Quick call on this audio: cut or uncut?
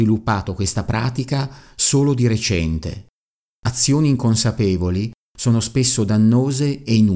cut